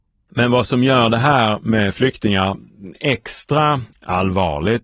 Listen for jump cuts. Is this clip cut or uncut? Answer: cut